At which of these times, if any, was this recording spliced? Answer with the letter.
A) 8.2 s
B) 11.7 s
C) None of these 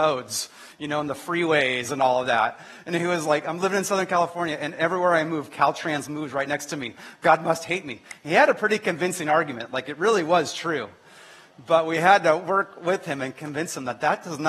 C